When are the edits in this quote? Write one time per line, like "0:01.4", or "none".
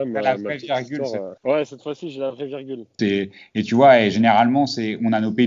0:01.4
0:03.0